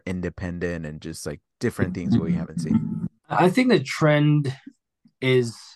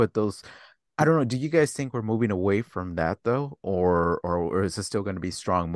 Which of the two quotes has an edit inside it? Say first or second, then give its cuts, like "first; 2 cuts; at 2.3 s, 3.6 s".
first; 1 cut; at 3.2 s